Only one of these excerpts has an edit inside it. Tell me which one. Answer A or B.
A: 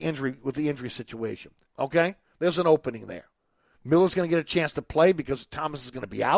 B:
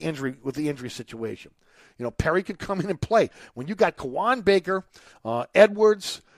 A